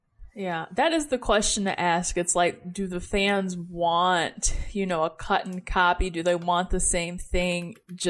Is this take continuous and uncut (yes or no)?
yes